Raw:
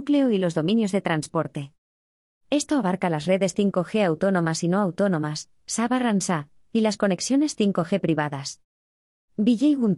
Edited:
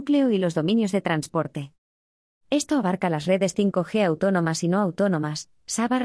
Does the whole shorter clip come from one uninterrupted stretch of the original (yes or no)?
yes